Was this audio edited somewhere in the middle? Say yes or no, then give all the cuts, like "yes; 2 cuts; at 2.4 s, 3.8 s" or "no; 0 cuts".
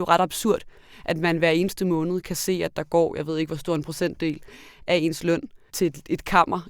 yes; 1 cut; at 5.7 s